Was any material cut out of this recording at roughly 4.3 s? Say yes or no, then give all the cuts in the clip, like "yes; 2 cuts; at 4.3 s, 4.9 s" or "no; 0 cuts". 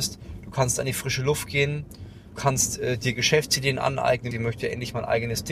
yes; 2 cuts; at 2.3 s, 4.3 s